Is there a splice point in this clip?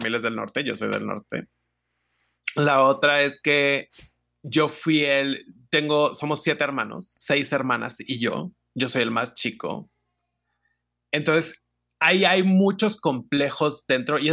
no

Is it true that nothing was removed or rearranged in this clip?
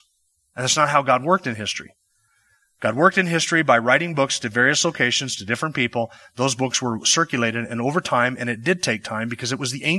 yes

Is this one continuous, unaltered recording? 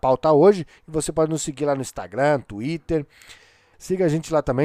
no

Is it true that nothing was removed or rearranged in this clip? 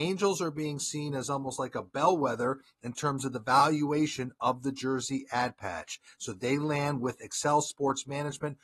yes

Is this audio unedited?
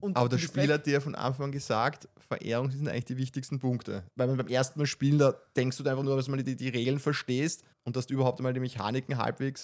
no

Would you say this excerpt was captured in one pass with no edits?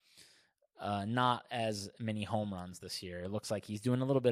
yes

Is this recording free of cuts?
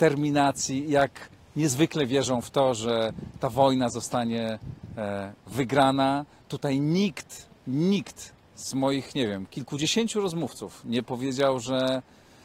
yes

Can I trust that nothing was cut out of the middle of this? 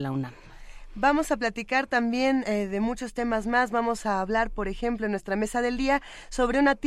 yes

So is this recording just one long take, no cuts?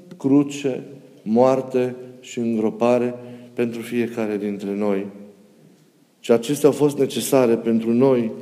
no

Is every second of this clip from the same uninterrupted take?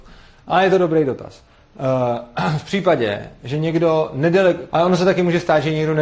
no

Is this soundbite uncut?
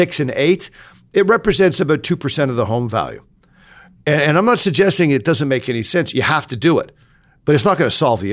yes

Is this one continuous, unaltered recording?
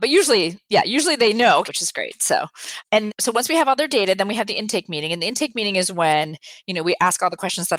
no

